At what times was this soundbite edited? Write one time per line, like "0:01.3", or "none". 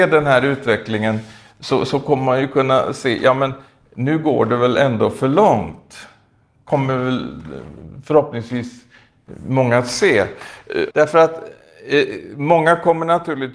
0:10.9